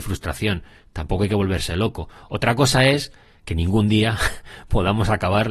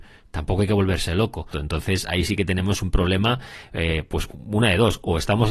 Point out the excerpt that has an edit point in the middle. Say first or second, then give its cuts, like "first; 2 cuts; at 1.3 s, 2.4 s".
second; 1 cut; at 1.5 s